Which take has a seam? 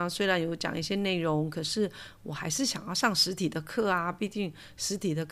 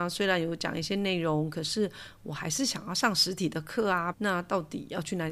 second; 1 cut; at 4.1 s

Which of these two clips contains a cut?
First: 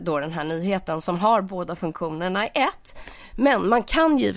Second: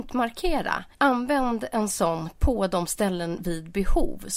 second; 1 cut; at 0.9 s

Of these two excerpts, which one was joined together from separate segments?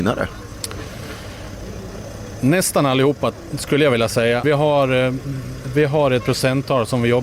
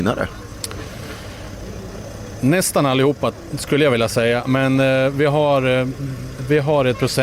first; 1 cut; at 4.4 s

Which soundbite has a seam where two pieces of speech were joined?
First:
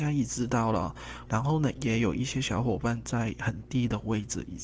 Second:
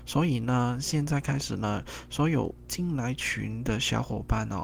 first; 1 cut; at 1.3 s

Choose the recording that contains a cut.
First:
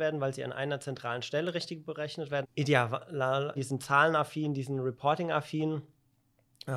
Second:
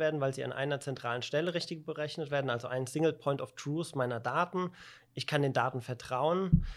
first; 2 cuts; at 2.4 s, 3.6 s

